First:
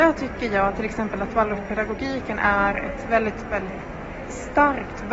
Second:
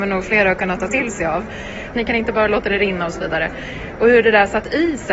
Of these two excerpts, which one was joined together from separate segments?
second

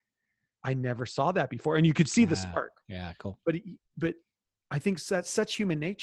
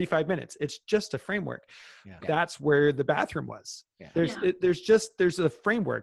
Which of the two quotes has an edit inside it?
second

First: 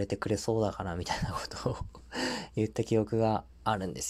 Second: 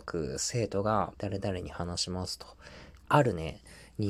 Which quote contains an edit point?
second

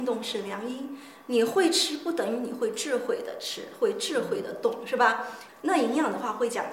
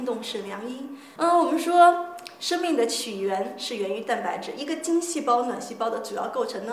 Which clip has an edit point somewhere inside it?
second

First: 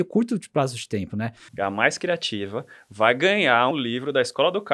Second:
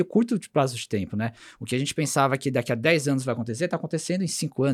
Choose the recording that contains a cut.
first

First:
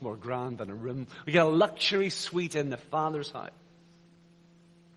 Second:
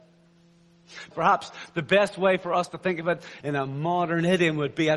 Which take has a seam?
second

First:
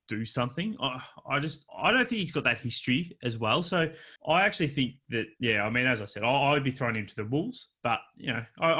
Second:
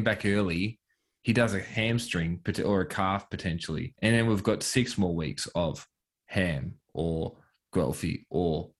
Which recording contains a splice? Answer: first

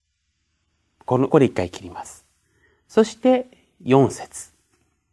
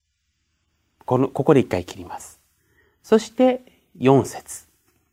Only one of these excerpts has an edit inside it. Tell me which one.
first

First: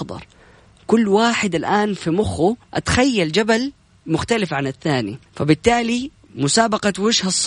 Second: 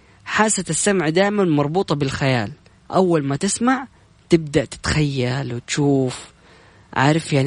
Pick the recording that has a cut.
first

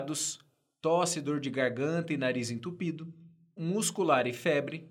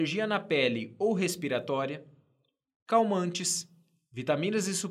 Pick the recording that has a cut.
first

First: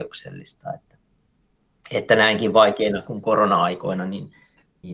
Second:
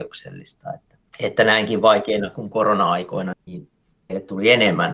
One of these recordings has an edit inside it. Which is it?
second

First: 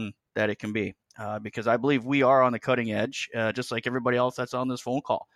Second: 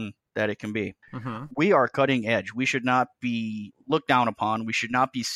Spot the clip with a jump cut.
second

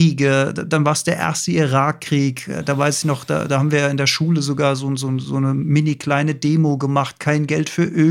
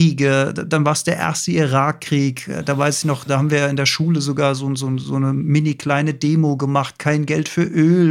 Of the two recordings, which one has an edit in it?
second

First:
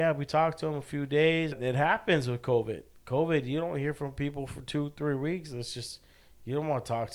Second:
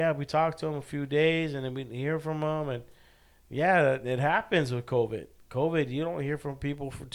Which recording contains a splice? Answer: first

